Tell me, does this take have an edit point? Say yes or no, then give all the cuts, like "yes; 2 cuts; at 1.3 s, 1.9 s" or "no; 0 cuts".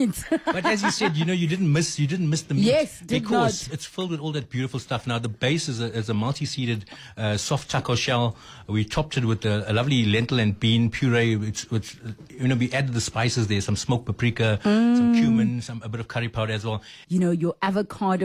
yes; 2 cuts; at 3.7 s, 17.0 s